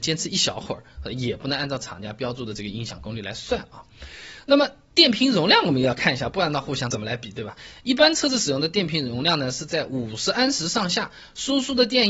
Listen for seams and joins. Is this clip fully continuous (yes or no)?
yes